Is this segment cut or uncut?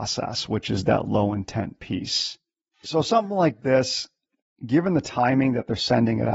uncut